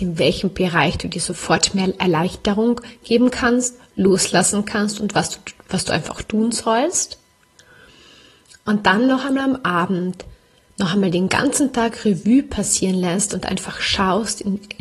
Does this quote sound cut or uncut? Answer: uncut